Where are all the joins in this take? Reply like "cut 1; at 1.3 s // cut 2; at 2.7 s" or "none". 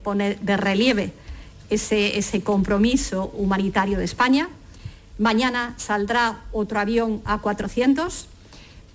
none